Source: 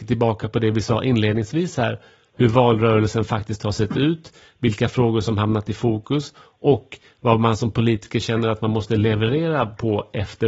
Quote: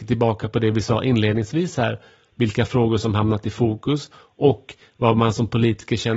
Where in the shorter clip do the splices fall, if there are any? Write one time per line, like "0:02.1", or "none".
0:02.3